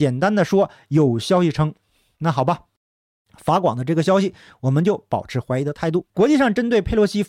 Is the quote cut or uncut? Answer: cut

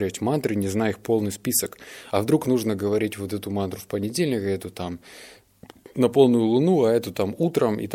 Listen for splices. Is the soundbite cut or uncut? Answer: uncut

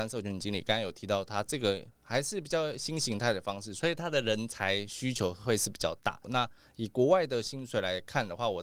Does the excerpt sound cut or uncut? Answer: cut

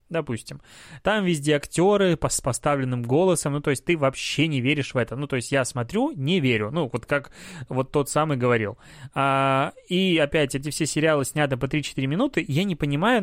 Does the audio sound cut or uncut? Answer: uncut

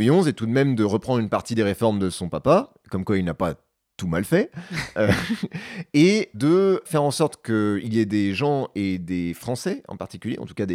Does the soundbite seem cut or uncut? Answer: uncut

